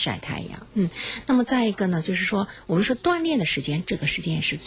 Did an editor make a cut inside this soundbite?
no; 0 cuts

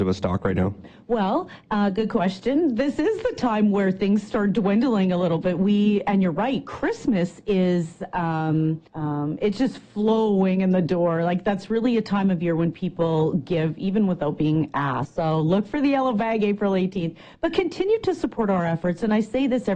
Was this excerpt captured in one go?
no; 2 cuts; at 8.9 s, 15.1 s

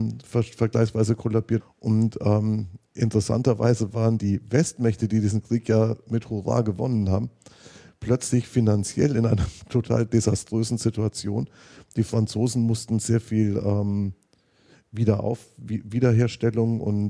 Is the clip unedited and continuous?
no; 1 cut; at 1.6 s

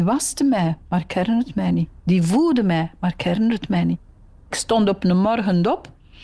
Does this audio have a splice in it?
no; 0 cuts

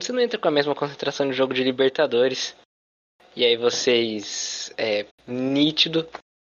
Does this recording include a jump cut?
yes; 1 cut; at 5.1 s

